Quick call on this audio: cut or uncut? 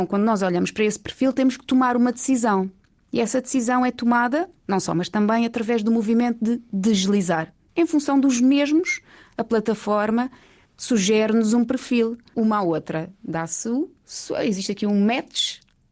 cut